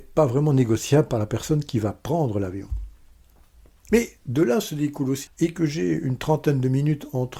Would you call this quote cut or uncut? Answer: cut